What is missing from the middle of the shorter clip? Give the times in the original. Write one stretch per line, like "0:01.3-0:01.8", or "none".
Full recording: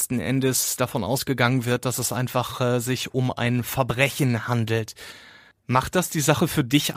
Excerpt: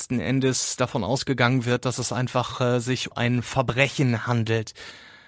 0:03.1-0:03.3